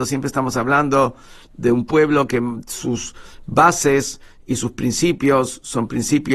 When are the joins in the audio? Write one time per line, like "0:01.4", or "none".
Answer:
none